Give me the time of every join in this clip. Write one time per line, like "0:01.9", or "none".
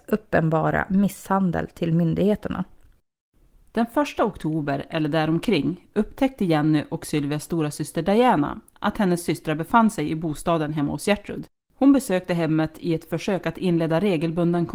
none